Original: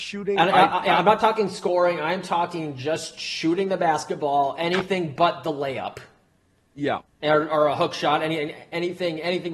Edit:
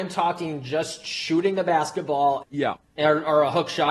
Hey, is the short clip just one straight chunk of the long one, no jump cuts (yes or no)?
no